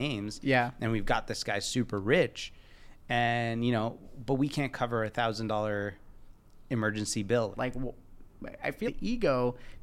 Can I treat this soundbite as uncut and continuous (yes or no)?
no